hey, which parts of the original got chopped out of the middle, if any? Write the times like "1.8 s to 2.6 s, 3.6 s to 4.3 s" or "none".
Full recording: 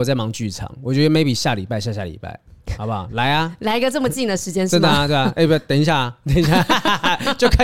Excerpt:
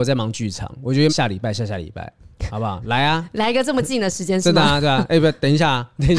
1.1 s to 1.4 s

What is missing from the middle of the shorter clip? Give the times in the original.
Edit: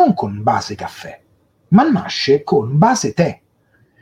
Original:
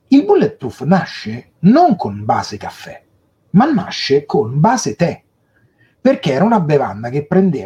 none

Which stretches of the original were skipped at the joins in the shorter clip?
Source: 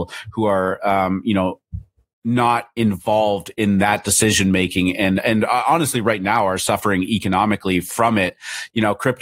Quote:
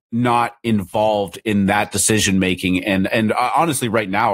none

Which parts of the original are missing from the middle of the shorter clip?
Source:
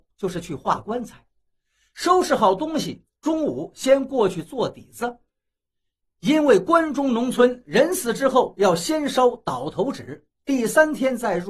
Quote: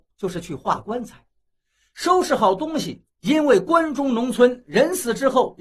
3.1 s to 6.1 s

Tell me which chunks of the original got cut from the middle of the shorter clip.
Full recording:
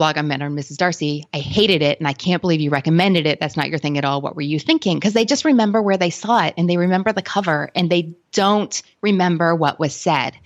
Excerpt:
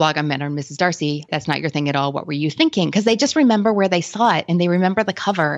1.3 s to 3.4 s

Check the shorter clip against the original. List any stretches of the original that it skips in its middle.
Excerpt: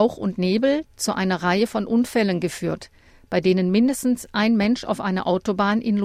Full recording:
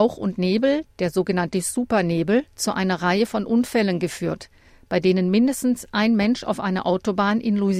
0.9 s to 2.5 s

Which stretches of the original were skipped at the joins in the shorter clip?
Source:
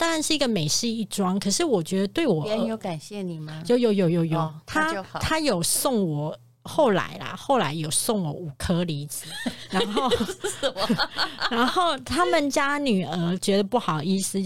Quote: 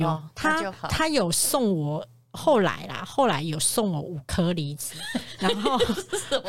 none

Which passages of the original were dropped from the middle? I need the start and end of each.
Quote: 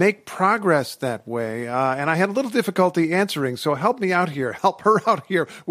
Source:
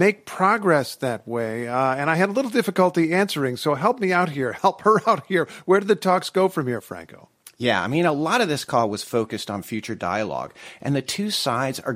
none

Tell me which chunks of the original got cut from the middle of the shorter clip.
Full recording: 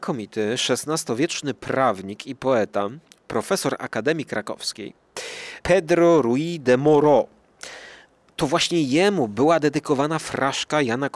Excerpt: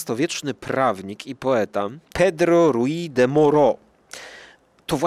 3.1 s to 5.6 s

